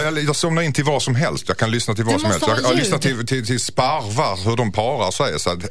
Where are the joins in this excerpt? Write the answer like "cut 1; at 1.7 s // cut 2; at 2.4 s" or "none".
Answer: none